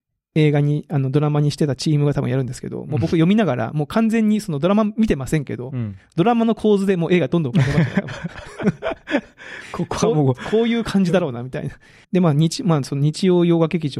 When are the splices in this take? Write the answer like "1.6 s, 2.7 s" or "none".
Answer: 12.0 s

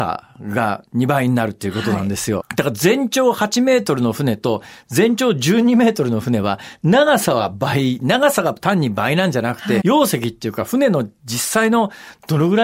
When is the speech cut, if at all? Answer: 2.4 s, 9.8 s

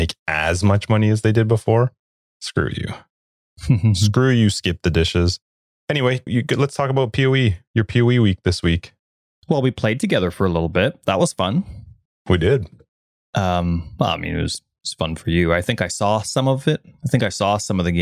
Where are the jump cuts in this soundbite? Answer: 6.3 s

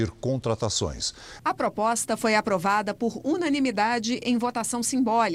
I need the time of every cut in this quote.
1.4 s

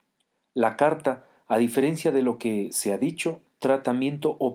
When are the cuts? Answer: 3.5 s

